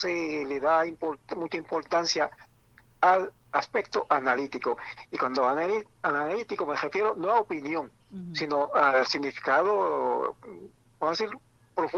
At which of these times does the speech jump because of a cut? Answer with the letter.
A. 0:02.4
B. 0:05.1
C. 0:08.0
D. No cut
C